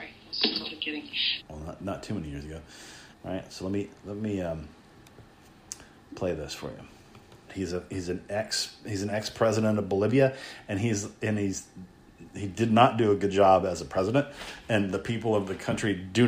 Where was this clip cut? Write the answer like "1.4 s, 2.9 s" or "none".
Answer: 1.4 s, 3.1 s, 7.5 s